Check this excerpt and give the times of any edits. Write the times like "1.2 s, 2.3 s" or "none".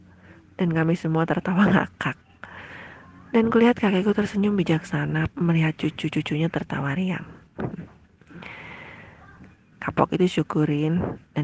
5.3 s

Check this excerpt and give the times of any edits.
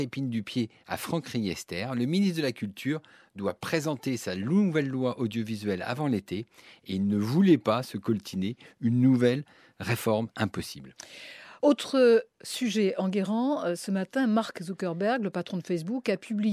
none

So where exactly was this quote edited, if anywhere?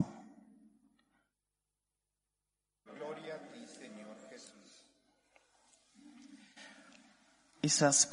2.9 s

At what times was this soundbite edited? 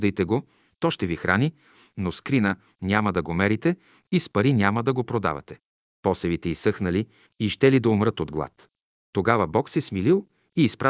5.9 s, 7.3 s

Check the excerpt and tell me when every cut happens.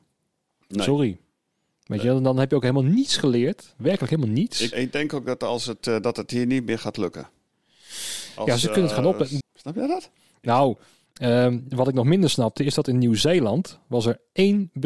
4.7 s, 9.4 s

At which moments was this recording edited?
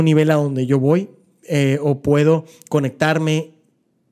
none

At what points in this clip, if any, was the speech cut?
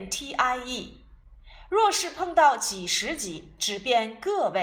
none

